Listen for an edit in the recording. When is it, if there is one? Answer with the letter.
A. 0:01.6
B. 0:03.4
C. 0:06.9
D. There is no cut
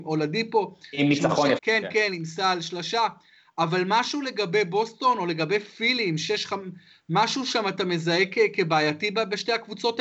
A